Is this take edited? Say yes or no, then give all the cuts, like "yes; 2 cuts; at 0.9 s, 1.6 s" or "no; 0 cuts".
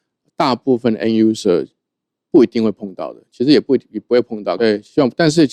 yes; 1 cut; at 4.6 s